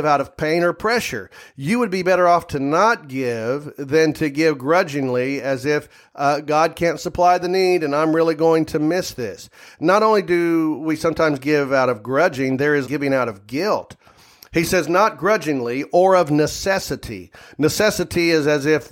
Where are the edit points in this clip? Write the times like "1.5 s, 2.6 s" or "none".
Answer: 12.8 s